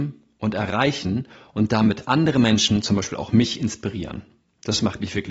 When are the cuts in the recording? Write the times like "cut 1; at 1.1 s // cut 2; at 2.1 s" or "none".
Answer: none